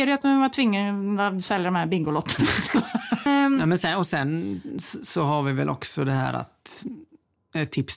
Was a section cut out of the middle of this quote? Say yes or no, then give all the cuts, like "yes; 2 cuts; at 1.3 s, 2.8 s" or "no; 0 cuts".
yes; 1 cut; at 3.3 s